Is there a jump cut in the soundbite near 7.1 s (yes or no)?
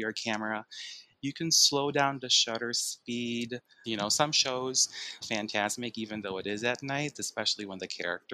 yes